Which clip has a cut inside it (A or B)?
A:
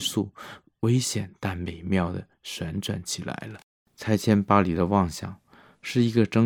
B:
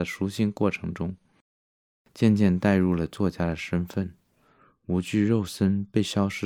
A